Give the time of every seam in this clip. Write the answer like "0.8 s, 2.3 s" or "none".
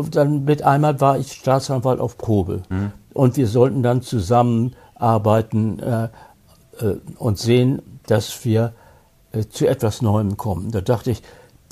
2.7 s